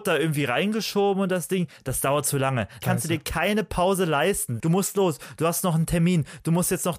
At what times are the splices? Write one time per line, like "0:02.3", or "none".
0:02.8
0:04.6